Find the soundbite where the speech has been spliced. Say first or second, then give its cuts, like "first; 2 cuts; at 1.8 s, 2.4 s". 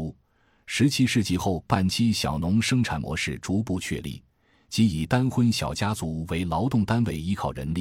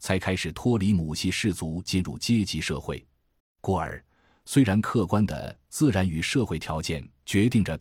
second; 1 cut; at 3.4 s